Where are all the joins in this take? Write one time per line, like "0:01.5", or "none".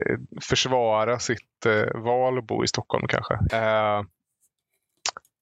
0:03.5